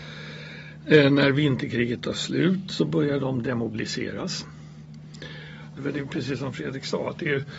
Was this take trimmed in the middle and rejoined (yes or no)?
yes